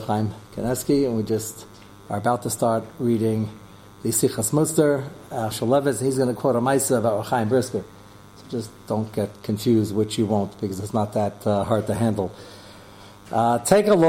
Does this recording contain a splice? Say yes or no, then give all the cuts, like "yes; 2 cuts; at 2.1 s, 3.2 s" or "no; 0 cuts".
yes; 1 cut; at 5.5 s